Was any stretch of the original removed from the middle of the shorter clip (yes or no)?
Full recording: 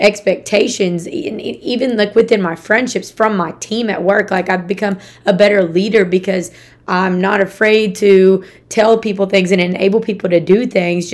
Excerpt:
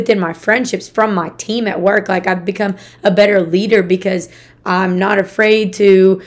no